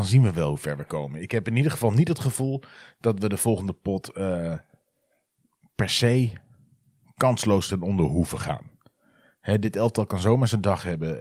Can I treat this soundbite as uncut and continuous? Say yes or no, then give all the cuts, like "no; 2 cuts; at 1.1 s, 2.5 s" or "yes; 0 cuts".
yes; 0 cuts